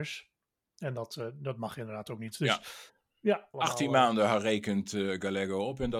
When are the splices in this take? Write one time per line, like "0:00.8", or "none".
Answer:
0:03.5